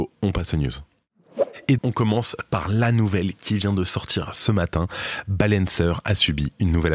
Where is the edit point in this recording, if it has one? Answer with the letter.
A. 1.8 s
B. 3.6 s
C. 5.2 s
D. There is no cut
A